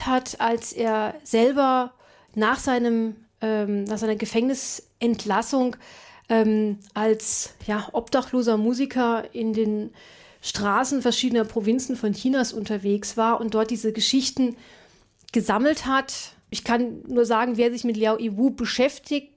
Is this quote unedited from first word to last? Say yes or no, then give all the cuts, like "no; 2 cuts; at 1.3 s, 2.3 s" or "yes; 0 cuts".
yes; 0 cuts